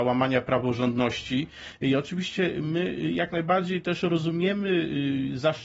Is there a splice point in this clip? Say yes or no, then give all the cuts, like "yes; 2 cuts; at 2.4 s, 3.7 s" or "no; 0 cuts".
no; 0 cuts